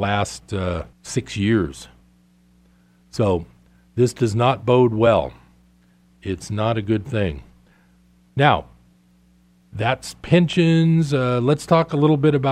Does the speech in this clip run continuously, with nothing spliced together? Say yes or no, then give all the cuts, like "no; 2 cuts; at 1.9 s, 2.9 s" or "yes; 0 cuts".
no; 1 cut; at 0.9 s